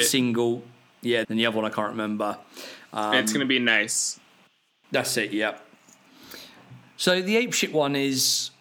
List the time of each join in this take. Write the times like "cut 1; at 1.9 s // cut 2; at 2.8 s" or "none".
cut 1; at 1.2 s